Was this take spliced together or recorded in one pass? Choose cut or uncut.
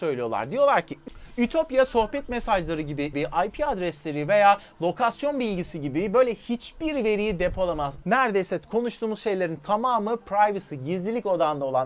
cut